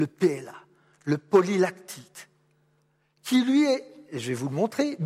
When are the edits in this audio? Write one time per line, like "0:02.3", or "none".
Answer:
none